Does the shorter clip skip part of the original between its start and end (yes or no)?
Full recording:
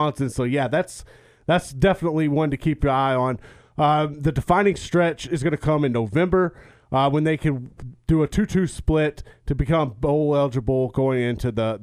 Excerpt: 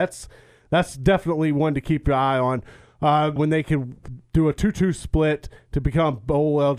yes